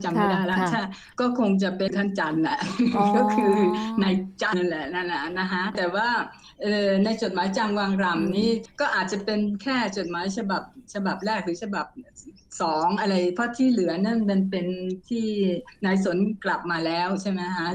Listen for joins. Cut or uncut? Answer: cut